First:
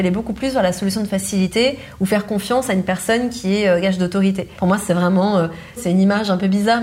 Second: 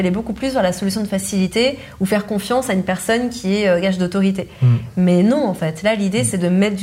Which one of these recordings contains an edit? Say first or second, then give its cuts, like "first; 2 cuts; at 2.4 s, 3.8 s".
first; 2 cuts; at 4.6 s, 5.8 s